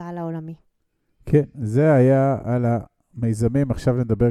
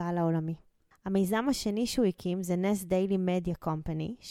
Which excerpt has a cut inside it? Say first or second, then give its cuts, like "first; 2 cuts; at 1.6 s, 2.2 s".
second; 1 cut; at 0.9 s